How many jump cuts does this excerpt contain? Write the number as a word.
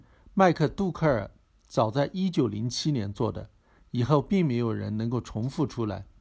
zero